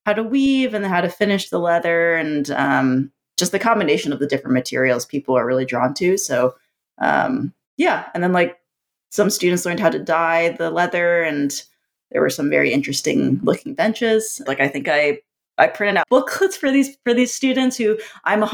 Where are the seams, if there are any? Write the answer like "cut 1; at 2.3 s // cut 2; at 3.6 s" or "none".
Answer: cut 1; at 14.5 s // cut 2; at 16.0 s